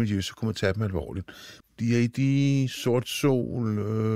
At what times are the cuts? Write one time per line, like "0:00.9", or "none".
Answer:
0:01.6